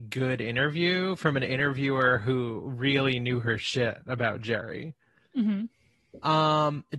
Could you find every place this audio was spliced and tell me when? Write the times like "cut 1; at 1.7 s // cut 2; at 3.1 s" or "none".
cut 1; at 5.3 s